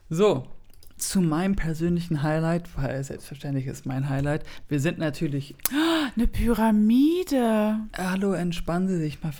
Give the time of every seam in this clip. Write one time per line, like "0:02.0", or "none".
0:01.0